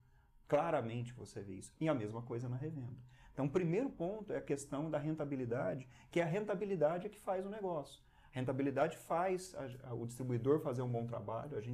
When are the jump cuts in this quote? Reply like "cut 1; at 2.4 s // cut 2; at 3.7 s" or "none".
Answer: none